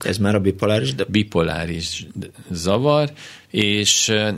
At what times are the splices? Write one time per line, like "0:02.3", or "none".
0:03.4